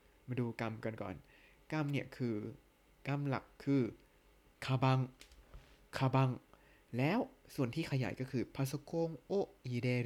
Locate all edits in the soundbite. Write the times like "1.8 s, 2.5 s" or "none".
none